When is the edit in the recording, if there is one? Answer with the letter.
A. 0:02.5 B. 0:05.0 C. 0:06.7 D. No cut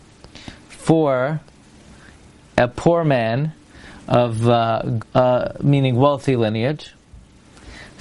B